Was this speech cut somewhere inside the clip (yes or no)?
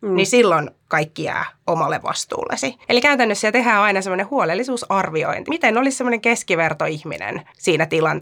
yes